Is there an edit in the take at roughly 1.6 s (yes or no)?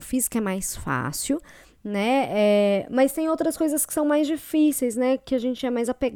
no